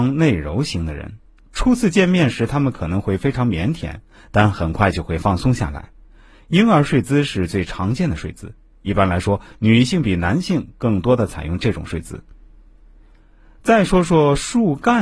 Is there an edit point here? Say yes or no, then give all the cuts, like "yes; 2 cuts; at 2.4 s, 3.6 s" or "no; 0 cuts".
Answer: no; 0 cuts